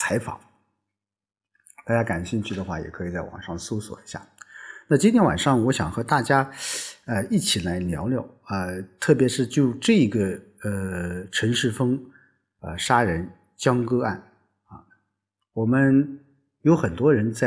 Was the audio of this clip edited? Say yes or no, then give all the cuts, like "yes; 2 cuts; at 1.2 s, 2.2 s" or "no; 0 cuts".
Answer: no; 0 cuts